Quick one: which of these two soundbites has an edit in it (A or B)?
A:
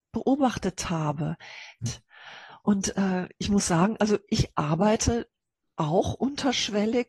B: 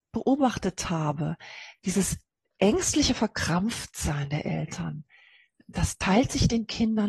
A